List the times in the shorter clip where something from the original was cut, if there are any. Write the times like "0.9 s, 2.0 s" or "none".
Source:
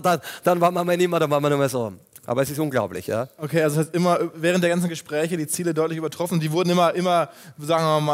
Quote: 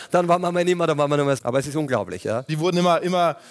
1.4 s, 2.5 s